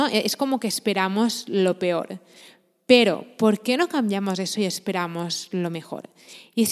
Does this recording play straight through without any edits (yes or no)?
yes